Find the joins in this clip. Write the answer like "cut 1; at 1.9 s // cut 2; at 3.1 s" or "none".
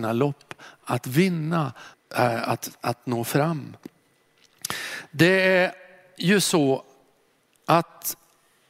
cut 1; at 1.9 s

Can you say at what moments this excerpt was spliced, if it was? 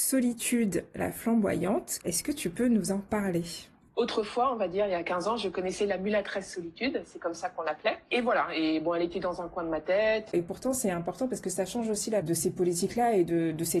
cut 1; at 10.3 s // cut 2; at 12.2 s

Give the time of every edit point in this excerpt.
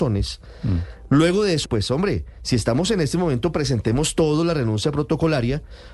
cut 1; at 1.6 s

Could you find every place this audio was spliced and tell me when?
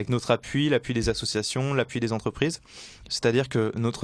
cut 1; at 3.1 s

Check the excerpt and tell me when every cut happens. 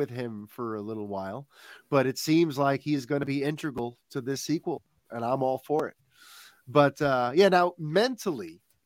none

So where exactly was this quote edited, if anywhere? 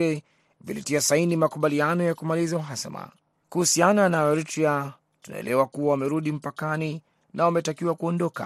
cut 1; at 3.4 s

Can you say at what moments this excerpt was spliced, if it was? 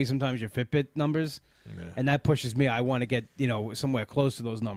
none

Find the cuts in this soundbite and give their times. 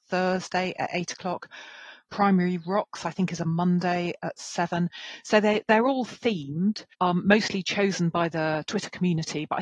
cut 1; at 6.9 s

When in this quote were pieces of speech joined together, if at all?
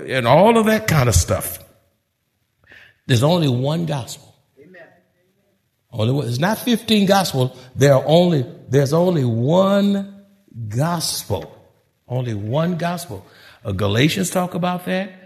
none

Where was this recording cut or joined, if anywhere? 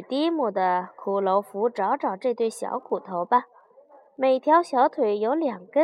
cut 1; at 4.1 s

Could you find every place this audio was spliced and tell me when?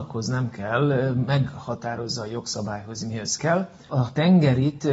cut 1; at 3.9 s

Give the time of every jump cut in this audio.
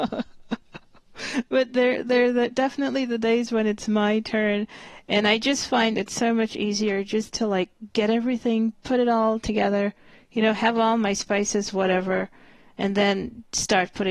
none

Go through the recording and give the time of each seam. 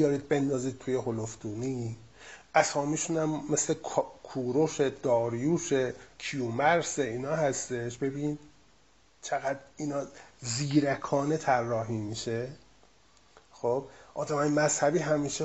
none

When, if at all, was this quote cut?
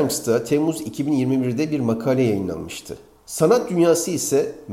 cut 1; at 3.2 s

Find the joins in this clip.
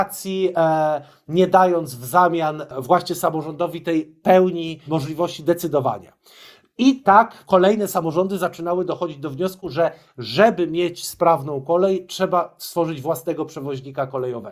none

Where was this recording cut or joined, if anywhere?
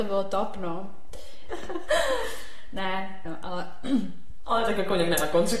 cut 1; at 1.5 s // cut 2; at 3.2 s

